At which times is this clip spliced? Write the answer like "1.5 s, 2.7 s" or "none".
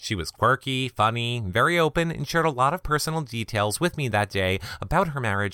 none